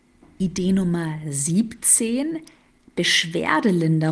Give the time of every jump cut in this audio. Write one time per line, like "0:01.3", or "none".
none